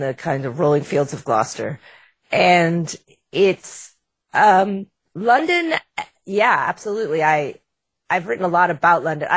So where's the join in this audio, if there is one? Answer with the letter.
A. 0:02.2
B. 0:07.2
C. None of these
C